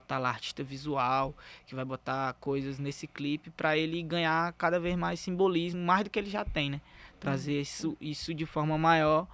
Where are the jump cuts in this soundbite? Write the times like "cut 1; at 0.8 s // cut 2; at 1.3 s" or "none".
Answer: none